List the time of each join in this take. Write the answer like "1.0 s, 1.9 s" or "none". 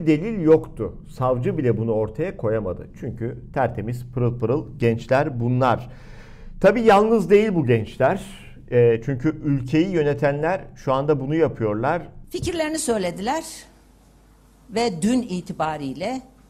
12.2 s